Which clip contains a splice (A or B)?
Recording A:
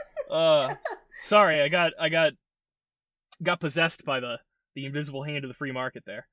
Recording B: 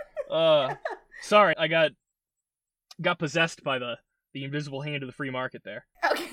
B